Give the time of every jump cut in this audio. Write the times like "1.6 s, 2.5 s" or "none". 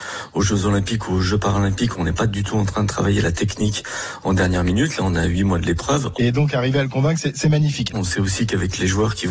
6.1 s, 7.9 s